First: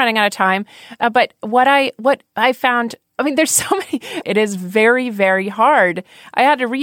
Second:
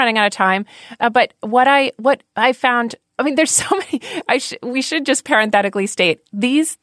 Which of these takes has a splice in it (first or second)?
first